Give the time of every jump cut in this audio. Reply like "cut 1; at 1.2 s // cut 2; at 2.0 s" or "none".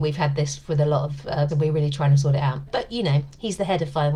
cut 1; at 1.5 s // cut 2; at 2.7 s